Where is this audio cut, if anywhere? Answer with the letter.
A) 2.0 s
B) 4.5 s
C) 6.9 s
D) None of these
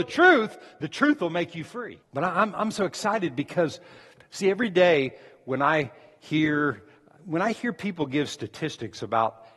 A